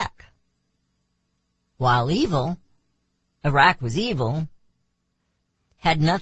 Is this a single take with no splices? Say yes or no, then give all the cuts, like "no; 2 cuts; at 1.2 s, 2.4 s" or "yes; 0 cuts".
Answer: yes; 0 cuts